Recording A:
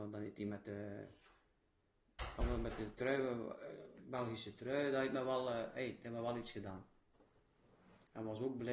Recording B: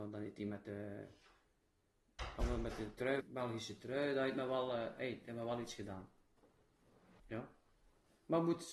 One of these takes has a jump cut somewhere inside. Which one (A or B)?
B